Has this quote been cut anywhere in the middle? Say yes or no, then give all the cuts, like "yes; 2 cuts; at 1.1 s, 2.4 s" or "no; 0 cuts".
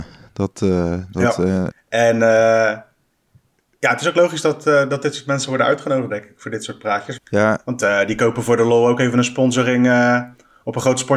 yes; 2 cuts; at 1.7 s, 7.2 s